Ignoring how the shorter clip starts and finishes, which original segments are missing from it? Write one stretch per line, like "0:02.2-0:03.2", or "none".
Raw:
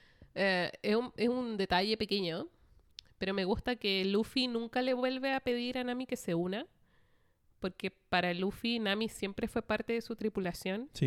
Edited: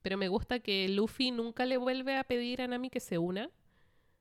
none